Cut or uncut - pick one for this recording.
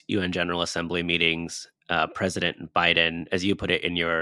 uncut